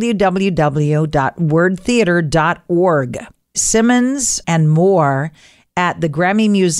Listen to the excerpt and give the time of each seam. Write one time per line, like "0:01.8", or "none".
0:03.5